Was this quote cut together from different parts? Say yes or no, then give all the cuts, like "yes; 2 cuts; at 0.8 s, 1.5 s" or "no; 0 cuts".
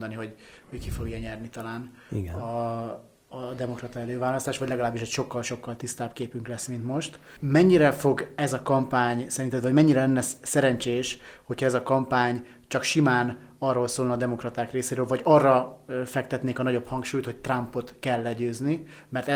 no; 0 cuts